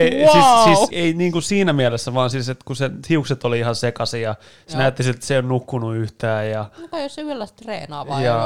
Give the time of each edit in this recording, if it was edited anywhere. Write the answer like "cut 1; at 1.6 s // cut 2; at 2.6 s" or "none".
cut 1; at 0.9 s